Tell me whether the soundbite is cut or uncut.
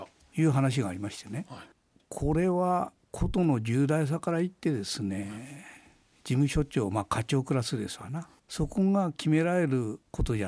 uncut